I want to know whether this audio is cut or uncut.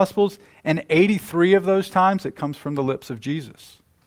uncut